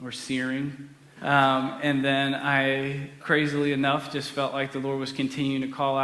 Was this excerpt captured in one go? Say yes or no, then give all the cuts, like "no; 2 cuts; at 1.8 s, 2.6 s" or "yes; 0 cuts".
no; 2 cuts; at 1.2 s, 3.2 s